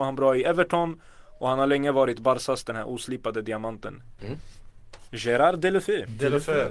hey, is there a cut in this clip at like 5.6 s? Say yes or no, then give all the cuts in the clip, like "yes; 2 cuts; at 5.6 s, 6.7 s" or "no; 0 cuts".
no; 1 cut; at 4.2 s